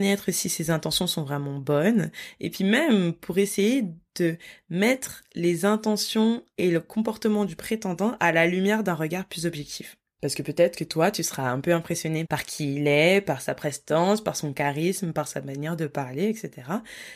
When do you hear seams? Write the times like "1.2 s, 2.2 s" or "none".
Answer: 12.3 s